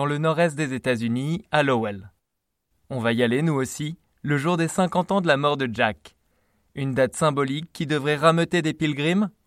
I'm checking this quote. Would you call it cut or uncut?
uncut